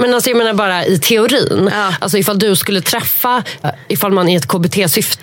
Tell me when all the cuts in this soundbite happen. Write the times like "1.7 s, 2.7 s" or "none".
3.6 s